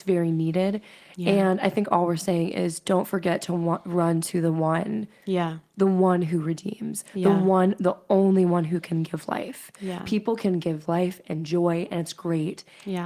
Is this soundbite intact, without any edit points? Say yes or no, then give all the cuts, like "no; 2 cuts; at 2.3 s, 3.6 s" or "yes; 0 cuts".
yes; 0 cuts